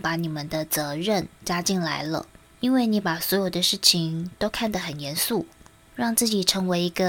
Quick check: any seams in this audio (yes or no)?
yes